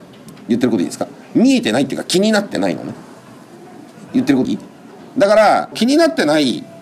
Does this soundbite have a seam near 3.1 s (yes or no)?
no